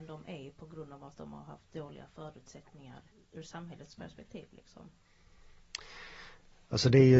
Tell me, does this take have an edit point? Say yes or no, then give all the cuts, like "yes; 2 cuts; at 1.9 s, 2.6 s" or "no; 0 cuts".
yes; 1 cut; at 3.1 s